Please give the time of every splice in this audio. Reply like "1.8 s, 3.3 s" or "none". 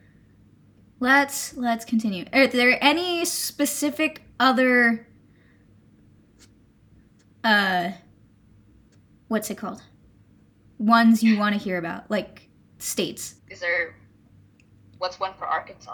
13.4 s